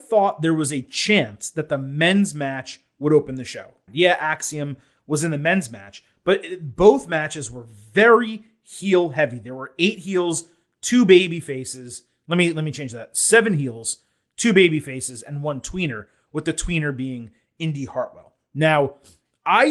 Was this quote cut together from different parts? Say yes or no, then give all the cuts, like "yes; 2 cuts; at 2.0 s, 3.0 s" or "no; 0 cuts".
yes; 1 cut; at 3.9 s